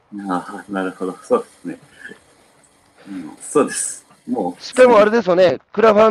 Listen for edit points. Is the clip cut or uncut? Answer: cut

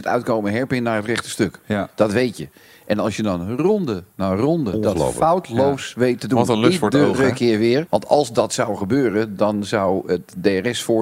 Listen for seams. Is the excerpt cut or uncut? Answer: cut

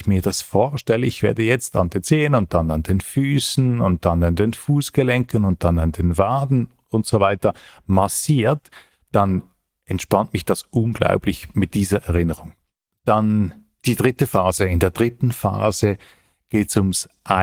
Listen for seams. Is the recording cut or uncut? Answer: cut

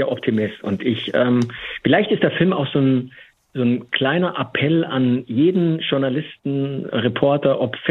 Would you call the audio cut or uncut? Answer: uncut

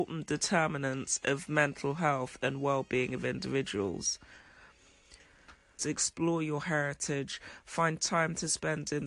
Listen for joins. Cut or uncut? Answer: cut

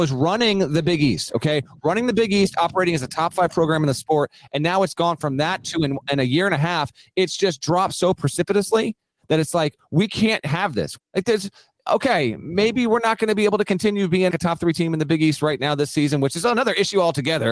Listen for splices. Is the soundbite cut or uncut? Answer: cut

